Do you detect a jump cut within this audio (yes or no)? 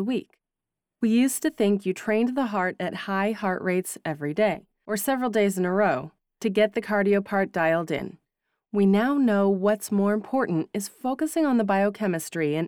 no